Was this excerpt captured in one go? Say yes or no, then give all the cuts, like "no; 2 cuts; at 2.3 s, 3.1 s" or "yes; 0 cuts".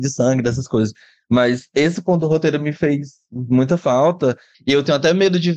no; 1 cut; at 4.5 s